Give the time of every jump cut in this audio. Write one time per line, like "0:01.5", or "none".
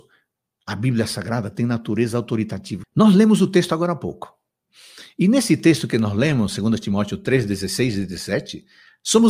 0:02.8